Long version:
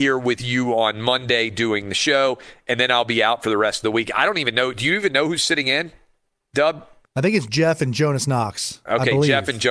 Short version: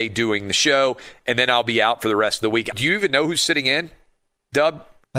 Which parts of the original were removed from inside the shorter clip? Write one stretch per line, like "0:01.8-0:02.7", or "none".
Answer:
0:04.1-0:04.7